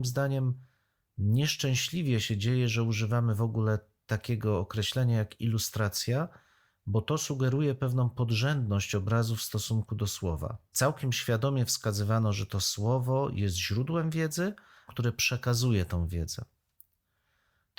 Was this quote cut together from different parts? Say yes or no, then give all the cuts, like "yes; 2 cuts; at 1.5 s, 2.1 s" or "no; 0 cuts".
yes; 2 cuts; at 10.7 s, 14.9 s